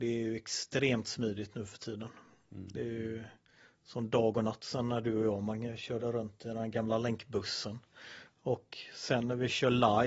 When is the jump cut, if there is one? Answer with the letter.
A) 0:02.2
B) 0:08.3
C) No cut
B